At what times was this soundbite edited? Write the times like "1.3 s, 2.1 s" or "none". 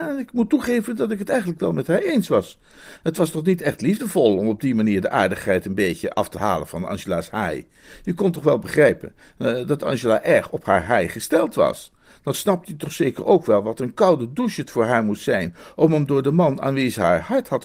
3.0 s